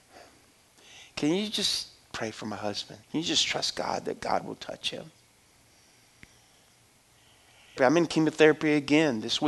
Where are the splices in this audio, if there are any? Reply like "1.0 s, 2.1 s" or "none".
3.0 s, 7.8 s